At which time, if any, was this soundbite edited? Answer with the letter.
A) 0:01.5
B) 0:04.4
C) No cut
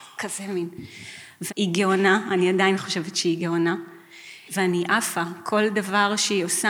A